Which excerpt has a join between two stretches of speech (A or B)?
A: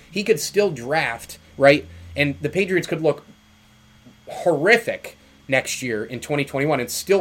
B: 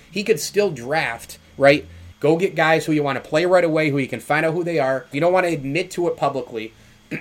B